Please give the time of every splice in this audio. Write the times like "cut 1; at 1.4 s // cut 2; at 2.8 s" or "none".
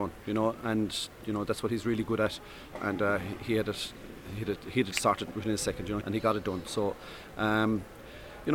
cut 1; at 4.9 s // cut 2; at 6.0 s